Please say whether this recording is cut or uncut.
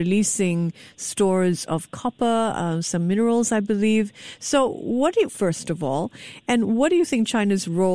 cut